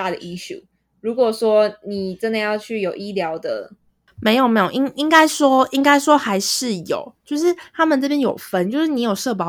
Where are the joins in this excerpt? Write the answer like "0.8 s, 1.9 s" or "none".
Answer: none